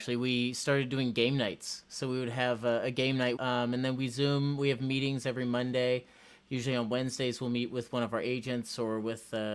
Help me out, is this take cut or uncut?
cut